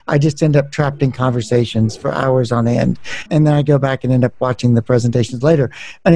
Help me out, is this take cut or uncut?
cut